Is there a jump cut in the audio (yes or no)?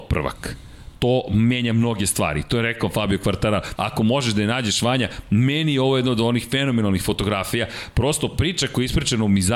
yes